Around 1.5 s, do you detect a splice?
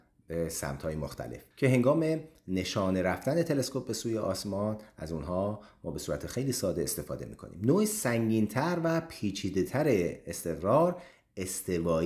yes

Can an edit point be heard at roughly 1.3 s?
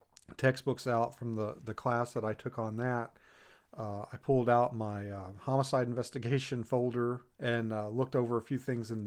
no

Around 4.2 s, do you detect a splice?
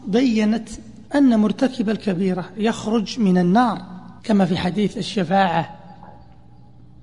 yes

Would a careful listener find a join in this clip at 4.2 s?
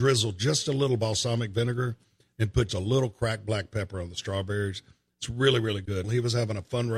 no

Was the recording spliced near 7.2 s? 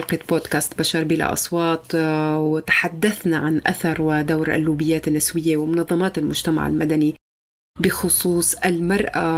no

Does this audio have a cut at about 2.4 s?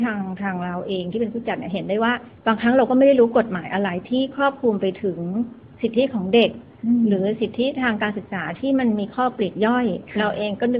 yes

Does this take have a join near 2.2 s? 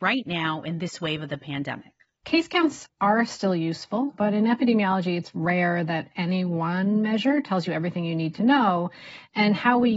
yes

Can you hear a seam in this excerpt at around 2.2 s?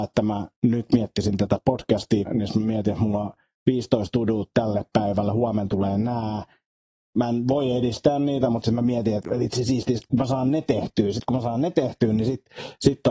yes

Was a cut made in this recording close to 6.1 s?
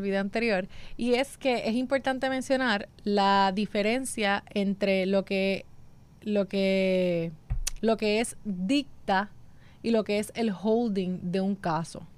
no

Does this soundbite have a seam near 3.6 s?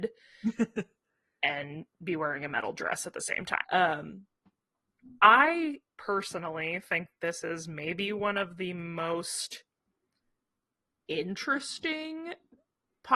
yes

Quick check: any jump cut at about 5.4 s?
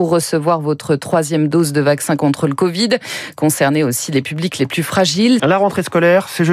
yes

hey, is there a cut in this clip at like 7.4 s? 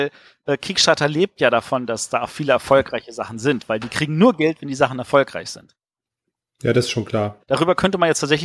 yes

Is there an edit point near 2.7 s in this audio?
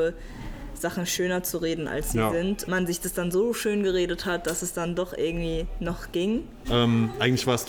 yes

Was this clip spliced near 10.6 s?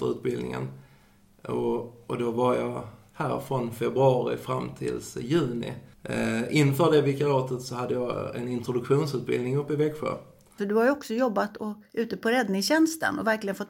yes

